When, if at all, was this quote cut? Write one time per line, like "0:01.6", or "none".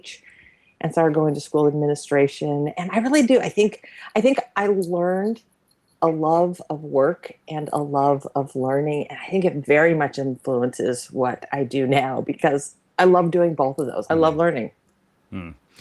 0:14.1